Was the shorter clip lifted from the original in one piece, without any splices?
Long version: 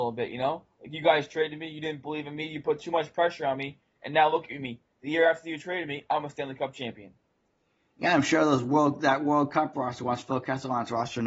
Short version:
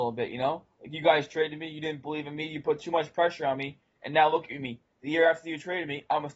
yes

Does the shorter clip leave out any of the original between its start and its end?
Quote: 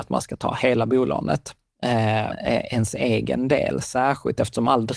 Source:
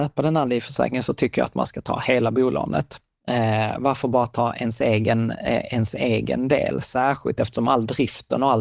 yes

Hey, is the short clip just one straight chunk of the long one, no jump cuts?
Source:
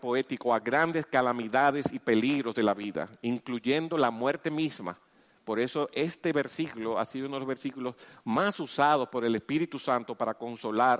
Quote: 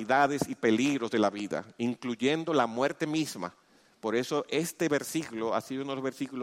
yes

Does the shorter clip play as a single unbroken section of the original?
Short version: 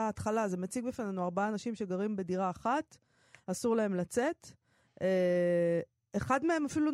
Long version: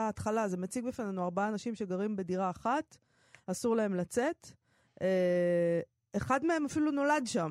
yes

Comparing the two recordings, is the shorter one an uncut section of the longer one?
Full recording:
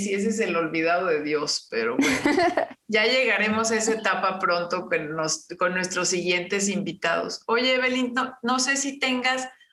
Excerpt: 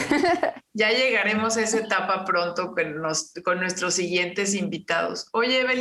yes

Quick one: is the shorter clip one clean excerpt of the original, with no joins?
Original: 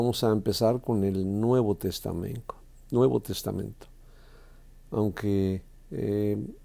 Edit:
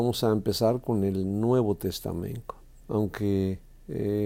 no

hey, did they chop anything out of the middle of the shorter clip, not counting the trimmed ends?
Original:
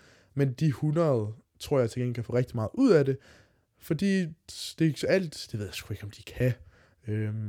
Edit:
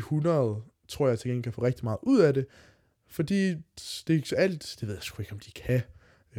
no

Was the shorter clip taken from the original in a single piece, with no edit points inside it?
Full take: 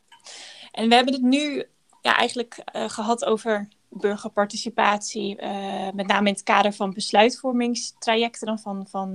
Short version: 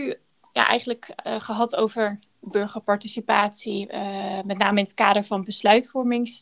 yes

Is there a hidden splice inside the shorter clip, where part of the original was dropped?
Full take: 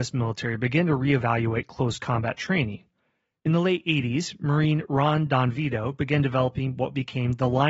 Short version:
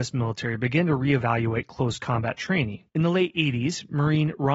yes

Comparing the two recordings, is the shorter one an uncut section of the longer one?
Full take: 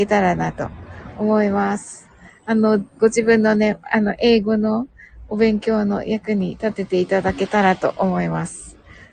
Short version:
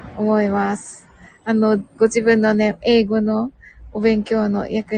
no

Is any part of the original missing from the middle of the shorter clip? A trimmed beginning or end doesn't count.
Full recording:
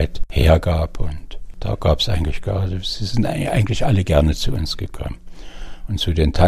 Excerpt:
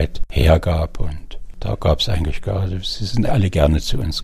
yes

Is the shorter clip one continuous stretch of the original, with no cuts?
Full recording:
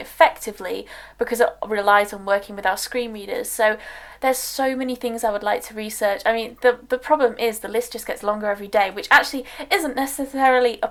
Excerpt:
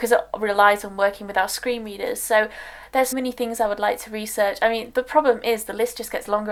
no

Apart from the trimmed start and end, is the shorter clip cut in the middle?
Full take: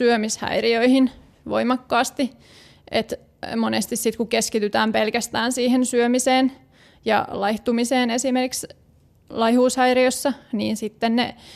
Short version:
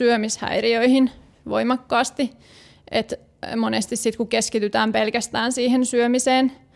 no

